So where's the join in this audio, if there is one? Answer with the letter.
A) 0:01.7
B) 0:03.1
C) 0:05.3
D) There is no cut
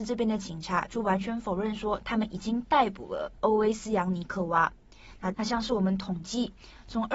C